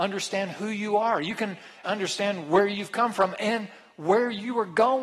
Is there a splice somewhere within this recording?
yes; 1 cut; at 1.8 s

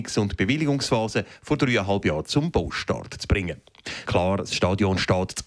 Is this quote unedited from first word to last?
no; 1 cut; at 4.0 s

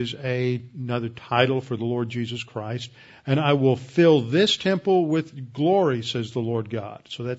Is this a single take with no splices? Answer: yes; 0 cuts

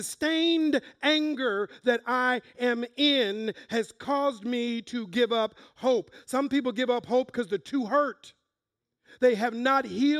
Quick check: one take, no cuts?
yes; 0 cuts

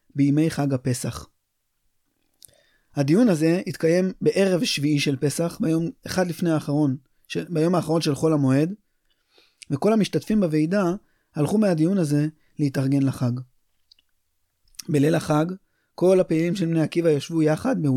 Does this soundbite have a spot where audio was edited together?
no; 0 cuts

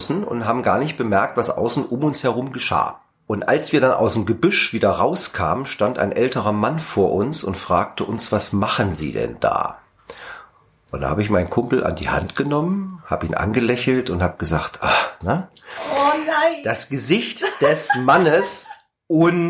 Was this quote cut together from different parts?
yes; 1 cut; at 15.2 s

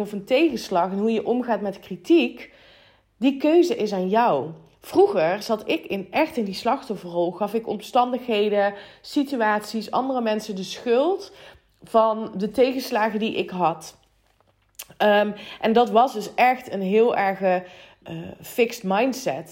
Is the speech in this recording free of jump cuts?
no; 1 cut; at 18.0 s

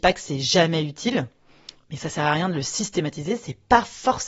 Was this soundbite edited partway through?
no; 0 cuts

